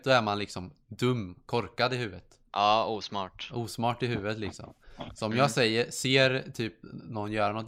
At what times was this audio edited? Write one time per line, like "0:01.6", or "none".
none